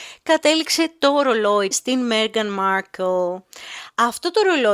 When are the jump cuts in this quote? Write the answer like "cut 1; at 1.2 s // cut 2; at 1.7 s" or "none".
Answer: cut 1; at 1.7 s